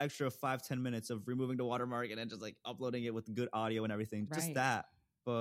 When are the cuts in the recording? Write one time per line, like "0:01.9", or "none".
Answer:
0:04.3